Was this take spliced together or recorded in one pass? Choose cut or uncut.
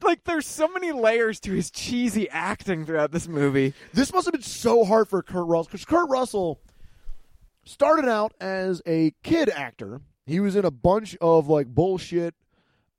cut